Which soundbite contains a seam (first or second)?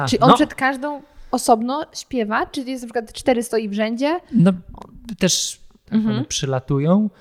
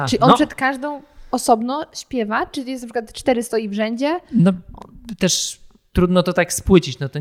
first